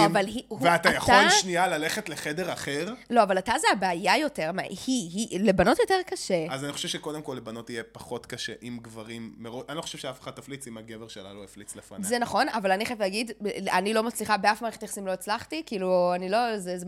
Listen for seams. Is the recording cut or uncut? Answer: uncut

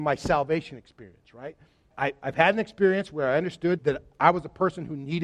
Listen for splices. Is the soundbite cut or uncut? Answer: cut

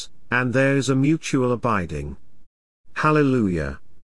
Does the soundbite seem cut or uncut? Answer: uncut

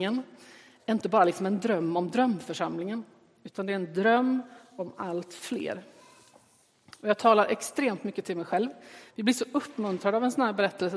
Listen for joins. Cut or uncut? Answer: cut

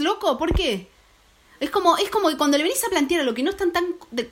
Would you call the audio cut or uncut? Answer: uncut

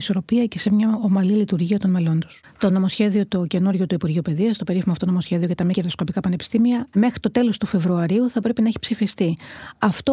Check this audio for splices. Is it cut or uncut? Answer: cut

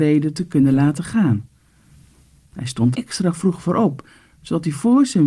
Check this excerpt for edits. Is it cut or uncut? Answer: cut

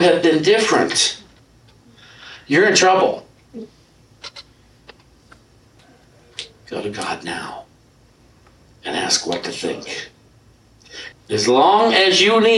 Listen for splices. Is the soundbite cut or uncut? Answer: cut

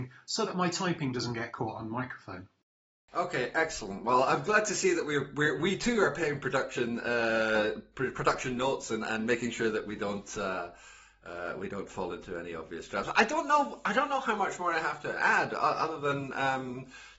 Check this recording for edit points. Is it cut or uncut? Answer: uncut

